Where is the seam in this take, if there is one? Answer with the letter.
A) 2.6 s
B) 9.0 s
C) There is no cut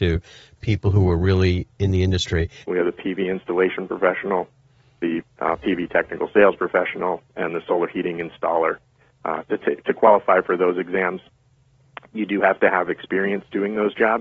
A